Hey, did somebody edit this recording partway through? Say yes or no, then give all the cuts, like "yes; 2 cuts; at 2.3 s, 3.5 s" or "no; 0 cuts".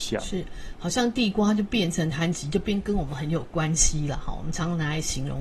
no; 0 cuts